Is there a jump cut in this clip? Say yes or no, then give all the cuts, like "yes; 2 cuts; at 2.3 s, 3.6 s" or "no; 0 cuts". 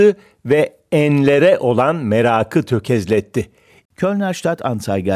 yes; 1 cut; at 3.9 s